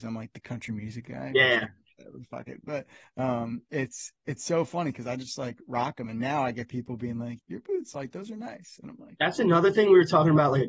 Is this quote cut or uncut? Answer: cut